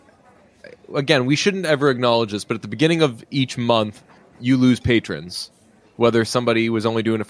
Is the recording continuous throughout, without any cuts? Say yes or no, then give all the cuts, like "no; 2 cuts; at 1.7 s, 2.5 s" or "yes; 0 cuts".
no; 1 cut; at 4.4 s